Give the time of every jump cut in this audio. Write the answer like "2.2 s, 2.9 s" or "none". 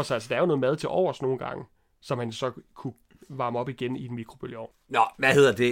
4.7 s